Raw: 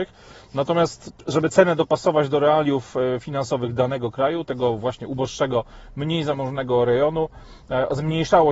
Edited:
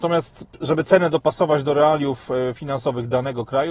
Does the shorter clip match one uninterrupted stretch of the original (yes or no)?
yes